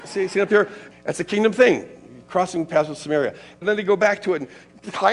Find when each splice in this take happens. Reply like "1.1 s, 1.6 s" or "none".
0.9 s, 3.6 s

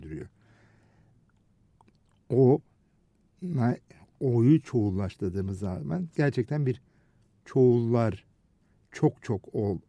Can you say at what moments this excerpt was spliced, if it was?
none

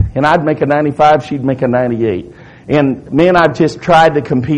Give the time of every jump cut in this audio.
none

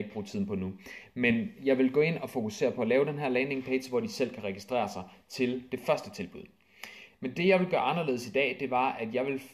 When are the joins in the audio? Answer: 7.1 s

